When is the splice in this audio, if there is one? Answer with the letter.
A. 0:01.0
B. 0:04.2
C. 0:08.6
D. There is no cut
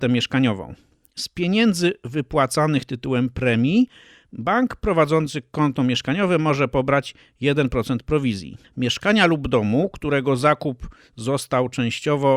C